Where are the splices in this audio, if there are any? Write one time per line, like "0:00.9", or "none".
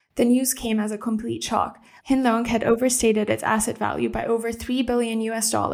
0:02.0